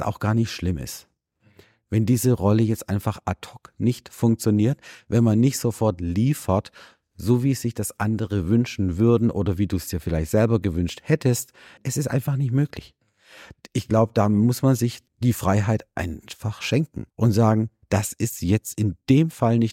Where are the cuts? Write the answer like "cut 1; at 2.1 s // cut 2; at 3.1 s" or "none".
cut 1; at 11.8 s // cut 2; at 15.1 s // cut 3; at 17.1 s